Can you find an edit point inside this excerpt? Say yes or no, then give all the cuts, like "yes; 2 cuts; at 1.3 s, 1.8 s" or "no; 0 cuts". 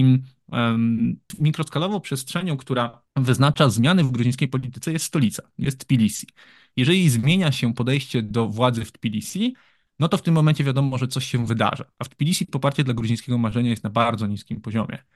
no; 0 cuts